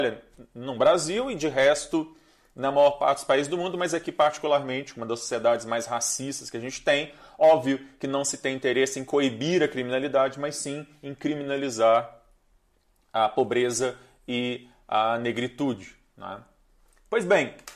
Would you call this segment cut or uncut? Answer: uncut